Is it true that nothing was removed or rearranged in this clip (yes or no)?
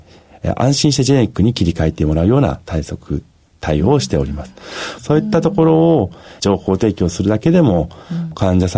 no